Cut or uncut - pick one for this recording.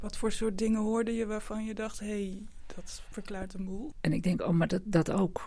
cut